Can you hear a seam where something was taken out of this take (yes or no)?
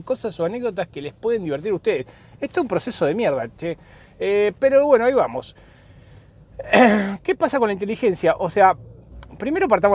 no